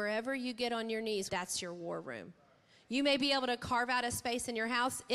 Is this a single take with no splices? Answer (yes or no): no